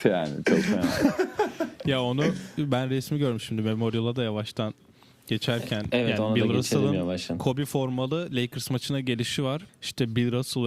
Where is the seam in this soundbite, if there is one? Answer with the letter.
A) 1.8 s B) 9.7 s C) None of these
B